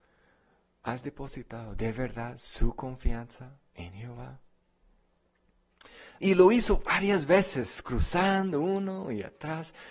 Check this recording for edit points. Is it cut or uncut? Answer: cut